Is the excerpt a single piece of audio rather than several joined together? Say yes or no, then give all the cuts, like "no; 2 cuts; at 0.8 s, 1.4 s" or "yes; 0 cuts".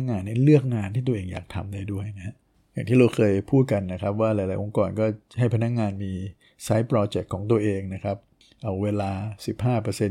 yes; 0 cuts